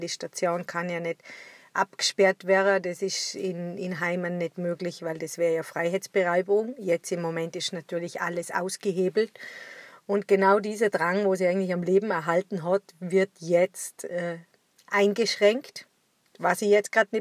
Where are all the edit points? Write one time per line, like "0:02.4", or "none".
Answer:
none